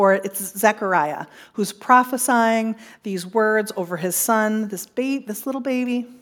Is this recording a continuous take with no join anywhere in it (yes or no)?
yes